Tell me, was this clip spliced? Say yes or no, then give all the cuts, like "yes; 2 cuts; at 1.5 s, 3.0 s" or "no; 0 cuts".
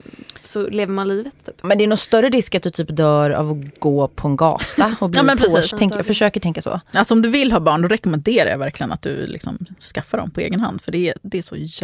yes; 2 cuts; at 1.6 s, 5.7 s